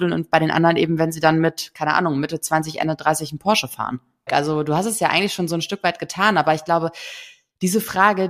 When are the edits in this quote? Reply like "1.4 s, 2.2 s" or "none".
4.3 s